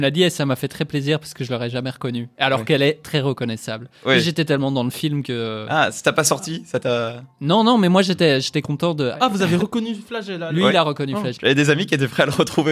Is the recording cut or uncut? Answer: cut